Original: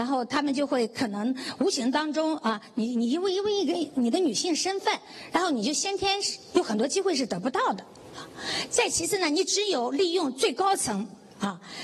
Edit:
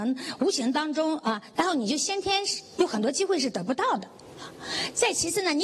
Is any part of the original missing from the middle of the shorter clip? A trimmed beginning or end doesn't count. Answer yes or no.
yes